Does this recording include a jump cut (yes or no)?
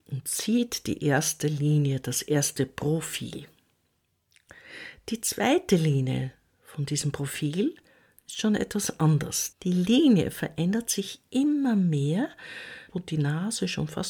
yes